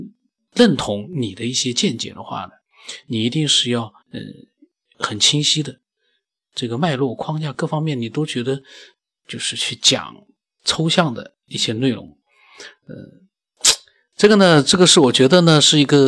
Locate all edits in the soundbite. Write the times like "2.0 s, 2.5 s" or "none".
4.0 s, 9.2 s